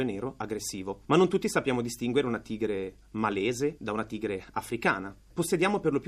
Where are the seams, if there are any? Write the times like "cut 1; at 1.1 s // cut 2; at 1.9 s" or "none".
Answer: cut 1; at 1.0 s // cut 2; at 3.8 s